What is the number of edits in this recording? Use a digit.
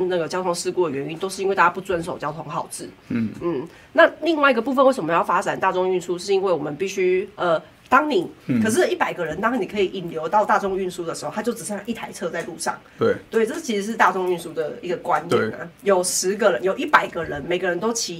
2